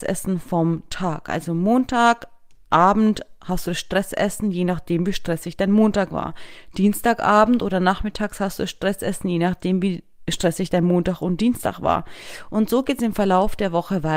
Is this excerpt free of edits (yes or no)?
yes